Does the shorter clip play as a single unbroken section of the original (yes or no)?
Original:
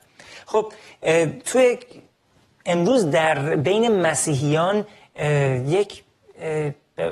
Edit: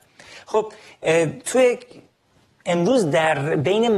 yes